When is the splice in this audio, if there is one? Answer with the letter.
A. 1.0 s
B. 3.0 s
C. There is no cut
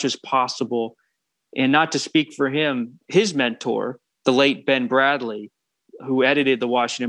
B